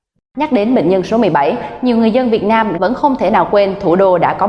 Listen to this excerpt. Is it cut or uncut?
cut